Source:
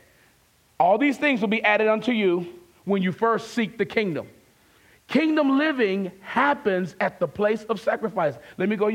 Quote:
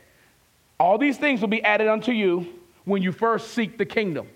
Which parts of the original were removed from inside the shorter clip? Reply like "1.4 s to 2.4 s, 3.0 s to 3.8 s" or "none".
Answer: none